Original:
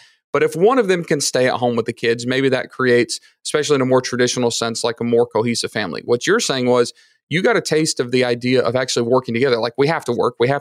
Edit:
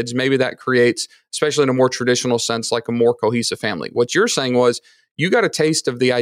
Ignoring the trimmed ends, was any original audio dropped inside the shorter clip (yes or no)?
no